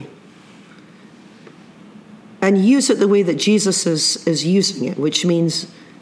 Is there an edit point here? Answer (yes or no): no